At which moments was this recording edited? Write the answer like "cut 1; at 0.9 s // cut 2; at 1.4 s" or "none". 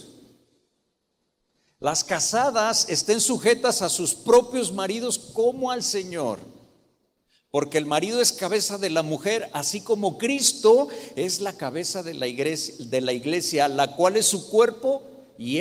none